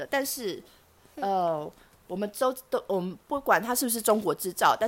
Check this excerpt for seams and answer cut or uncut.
uncut